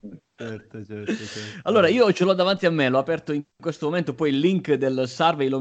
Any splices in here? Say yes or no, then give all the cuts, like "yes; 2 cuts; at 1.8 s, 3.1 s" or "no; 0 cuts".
no; 0 cuts